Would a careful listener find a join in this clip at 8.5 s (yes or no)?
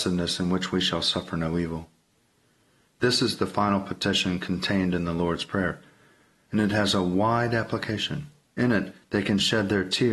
yes